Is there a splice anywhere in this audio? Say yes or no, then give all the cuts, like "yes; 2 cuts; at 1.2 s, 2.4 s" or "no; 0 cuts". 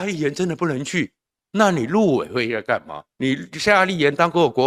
yes; 1 cut; at 3.1 s